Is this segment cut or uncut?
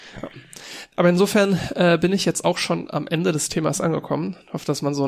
uncut